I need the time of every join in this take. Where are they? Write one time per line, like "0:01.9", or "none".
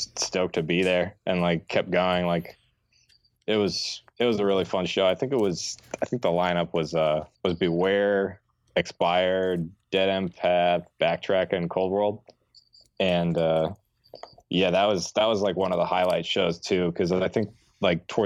0:07.3